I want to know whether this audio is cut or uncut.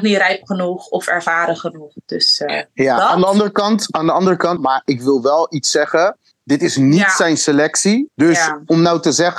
cut